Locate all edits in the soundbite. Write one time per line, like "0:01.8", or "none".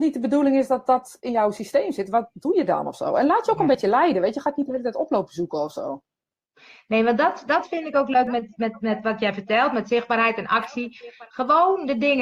none